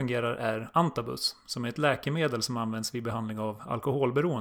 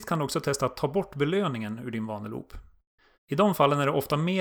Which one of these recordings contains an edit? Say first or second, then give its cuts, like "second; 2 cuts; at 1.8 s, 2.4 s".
second; 1 cut; at 3.1 s